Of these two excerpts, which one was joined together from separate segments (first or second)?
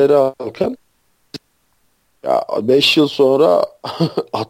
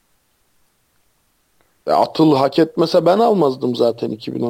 first